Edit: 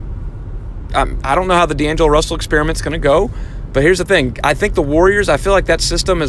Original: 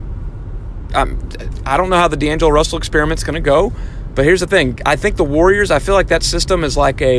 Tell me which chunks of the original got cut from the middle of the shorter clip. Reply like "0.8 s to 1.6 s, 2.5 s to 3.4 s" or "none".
1.2 s to 1.6 s